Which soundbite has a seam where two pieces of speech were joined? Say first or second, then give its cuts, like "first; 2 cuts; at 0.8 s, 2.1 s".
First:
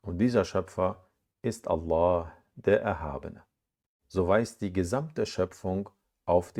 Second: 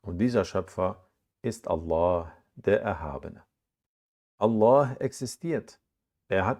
first; 1 cut; at 4.0 s